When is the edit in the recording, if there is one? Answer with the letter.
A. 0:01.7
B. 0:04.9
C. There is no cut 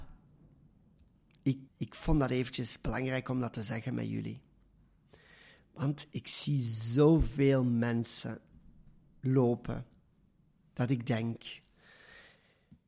A